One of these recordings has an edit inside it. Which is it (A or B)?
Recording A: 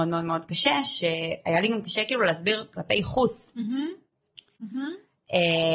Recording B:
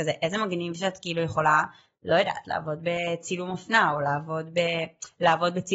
A